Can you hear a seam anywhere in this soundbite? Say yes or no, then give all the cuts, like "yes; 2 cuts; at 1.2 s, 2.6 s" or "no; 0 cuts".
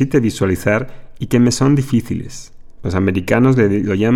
yes; 1 cut; at 2.8 s